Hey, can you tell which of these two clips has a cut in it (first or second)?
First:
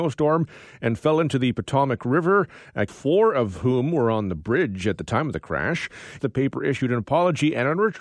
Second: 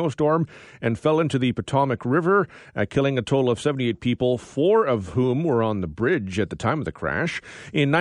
first